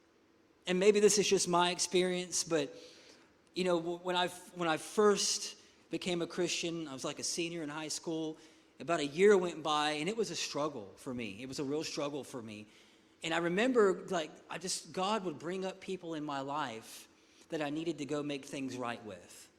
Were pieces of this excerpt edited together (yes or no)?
no